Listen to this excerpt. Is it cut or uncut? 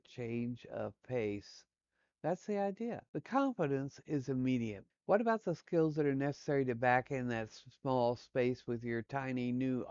cut